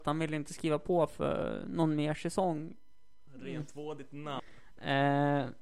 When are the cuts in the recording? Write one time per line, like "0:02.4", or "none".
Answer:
0:03.3
0:04.4

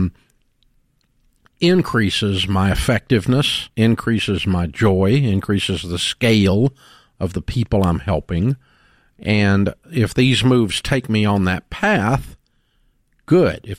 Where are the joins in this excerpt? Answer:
0:03.7

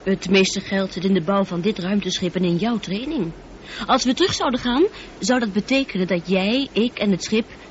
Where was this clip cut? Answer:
none

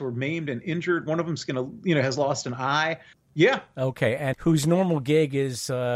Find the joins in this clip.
0:03.1
0:04.3

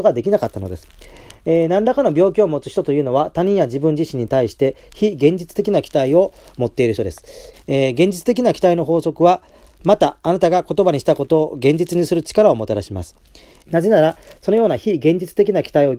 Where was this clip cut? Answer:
0:07.5
0:13.7

